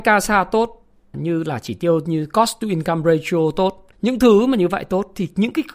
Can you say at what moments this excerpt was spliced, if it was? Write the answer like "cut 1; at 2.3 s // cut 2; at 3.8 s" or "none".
cut 1; at 1.1 s // cut 2; at 3.9 s